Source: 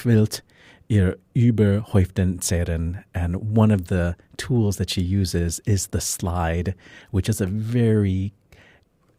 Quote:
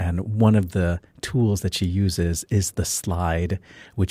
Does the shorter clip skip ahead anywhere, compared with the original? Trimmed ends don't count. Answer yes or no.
no